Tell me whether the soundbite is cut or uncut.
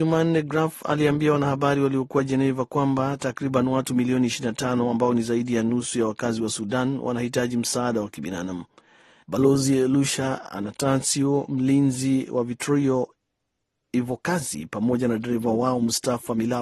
cut